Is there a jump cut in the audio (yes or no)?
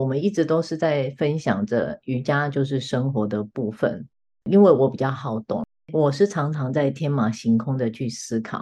no